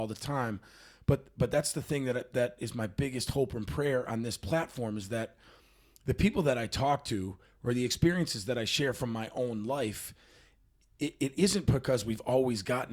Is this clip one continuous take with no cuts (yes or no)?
yes